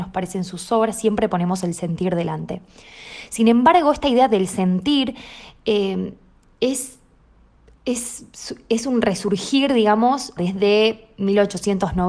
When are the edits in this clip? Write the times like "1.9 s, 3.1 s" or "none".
10.4 s